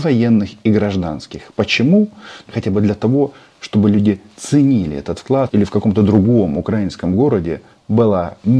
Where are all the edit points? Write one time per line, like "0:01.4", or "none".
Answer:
0:02.5
0:05.5